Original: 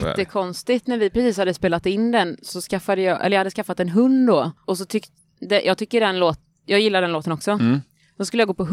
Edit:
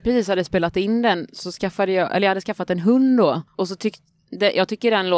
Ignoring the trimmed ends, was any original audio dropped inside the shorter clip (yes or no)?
no